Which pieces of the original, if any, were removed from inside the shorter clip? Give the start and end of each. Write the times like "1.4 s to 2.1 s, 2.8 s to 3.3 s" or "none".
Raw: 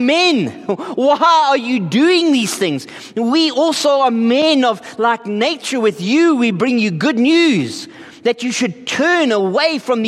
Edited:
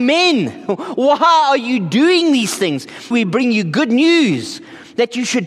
3.1 s to 6.4 s